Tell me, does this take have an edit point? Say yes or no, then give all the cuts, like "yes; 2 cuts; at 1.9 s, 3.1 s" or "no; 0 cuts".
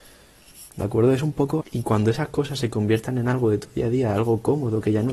yes; 1 cut; at 1.6 s